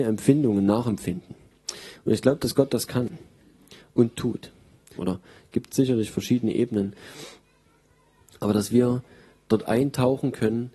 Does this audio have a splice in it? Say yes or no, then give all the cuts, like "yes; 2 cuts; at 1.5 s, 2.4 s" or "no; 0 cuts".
yes; 1 cut; at 5.0 s